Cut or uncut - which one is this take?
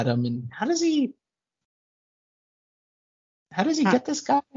uncut